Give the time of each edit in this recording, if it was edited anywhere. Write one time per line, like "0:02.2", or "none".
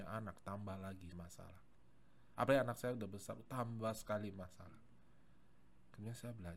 0:01.1